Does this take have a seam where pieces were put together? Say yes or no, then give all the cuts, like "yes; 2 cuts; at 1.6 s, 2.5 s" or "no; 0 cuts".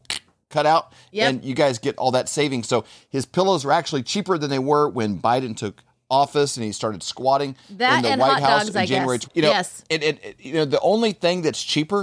yes; 1 cut; at 9.2 s